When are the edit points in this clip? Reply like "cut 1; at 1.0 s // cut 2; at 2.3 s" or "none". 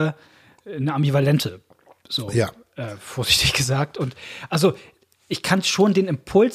none